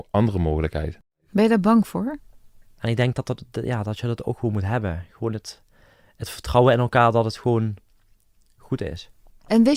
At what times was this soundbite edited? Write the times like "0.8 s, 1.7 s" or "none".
2.8 s